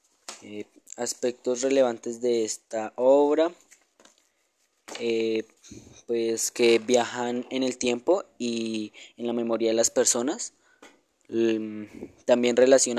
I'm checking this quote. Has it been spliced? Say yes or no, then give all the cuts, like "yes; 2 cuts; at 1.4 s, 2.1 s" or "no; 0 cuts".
no; 0 cuts